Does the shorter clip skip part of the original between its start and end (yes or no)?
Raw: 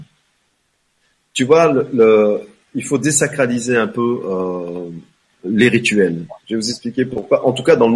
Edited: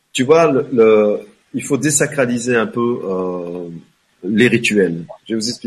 no